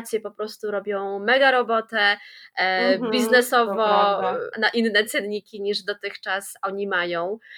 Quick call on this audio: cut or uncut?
cut